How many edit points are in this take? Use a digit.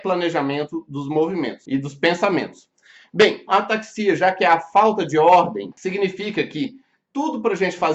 1